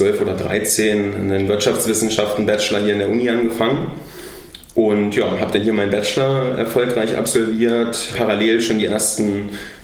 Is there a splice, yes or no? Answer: yes